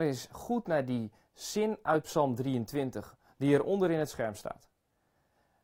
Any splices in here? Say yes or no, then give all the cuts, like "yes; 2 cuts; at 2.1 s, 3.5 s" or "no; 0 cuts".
no; 0 cuts